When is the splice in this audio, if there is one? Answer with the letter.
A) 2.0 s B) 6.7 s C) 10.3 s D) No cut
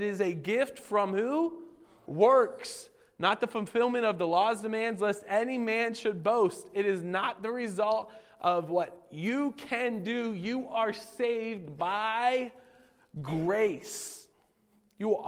A